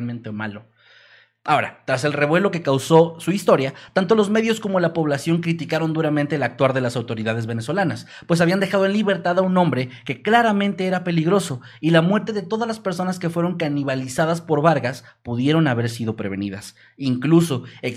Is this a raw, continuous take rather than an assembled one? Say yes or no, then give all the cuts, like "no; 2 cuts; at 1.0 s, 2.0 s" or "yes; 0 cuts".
yes; 0 cuts